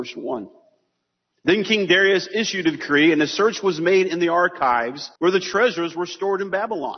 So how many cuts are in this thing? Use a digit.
1